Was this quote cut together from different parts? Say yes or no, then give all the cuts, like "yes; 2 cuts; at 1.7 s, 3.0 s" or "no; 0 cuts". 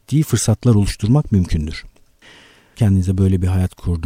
yes; 1 cut; at 2.8 s